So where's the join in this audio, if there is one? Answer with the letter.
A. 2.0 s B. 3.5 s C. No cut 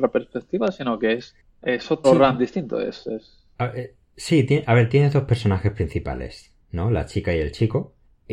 A